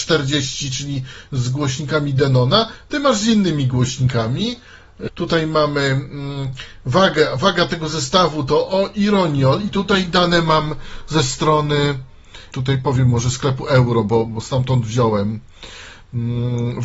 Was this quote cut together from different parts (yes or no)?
yes